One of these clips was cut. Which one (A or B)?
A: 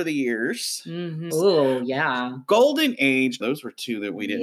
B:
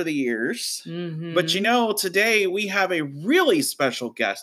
A